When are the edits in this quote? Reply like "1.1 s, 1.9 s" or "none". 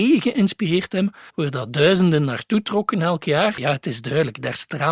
1.3 s, 3.6 s